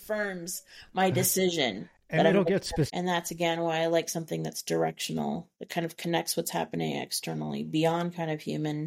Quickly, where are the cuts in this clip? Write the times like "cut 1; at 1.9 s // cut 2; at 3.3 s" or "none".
cut 1; at 2.9 s // cut 2; at 5.5 s